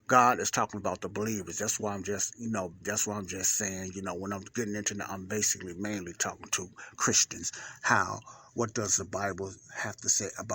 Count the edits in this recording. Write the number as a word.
one